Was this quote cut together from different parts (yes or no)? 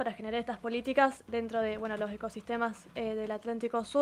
no